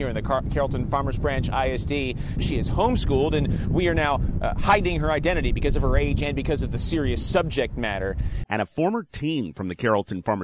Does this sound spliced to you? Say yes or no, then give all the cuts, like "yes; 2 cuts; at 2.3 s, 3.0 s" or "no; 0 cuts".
yes; 2 cuts; at 2.4 s, 8.4 s